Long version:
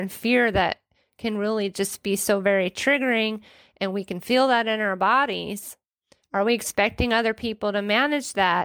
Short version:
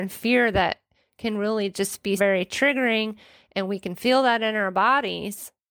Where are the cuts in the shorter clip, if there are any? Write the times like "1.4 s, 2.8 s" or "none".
2.2 s